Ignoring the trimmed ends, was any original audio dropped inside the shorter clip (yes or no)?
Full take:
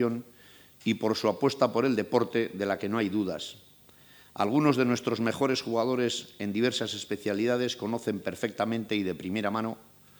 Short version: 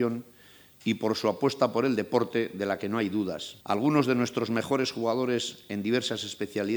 yes